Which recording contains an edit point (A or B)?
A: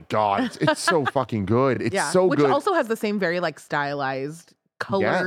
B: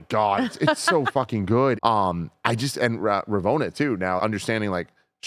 B